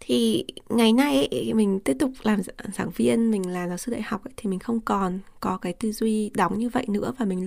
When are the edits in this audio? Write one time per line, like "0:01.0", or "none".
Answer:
none